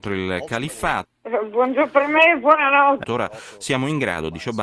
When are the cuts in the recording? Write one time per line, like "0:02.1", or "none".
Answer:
0:01.0
0:03.0

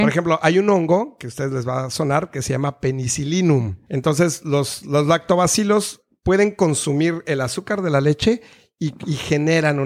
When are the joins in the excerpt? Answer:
0:03.9

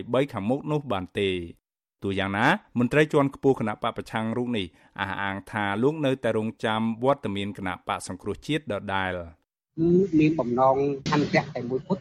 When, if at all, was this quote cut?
none

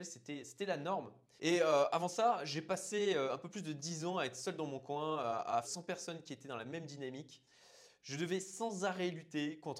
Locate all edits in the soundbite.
0:01.4
0:05.6

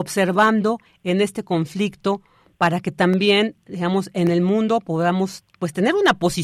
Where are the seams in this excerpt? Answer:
none

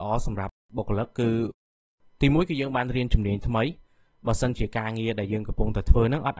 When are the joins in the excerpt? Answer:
none

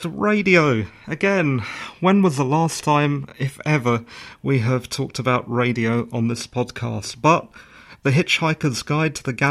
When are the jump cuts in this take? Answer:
none

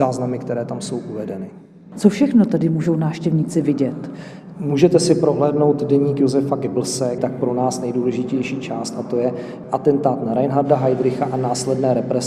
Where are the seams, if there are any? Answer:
0:01.9
0:07.2

